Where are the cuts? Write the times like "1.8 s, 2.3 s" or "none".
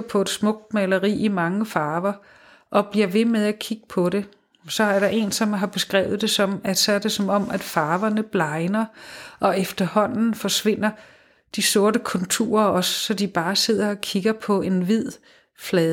none